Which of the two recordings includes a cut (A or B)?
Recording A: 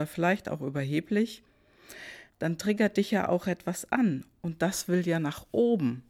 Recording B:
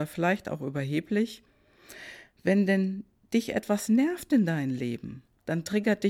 A